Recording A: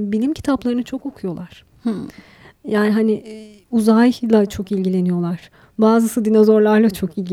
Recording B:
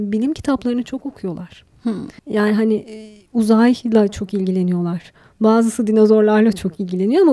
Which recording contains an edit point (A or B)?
B